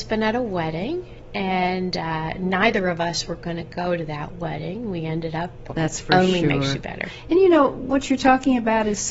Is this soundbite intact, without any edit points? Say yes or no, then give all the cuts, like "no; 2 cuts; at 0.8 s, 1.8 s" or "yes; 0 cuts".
no; 1 cut; at 5.7 s